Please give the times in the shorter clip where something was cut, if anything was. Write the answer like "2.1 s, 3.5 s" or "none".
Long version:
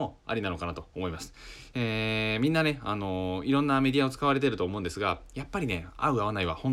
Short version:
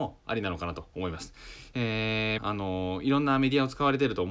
2.4 s